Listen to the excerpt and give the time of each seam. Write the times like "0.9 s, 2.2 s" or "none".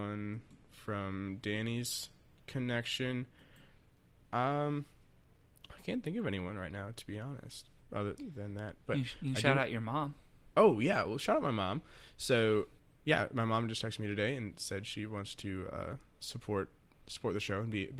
7.8 s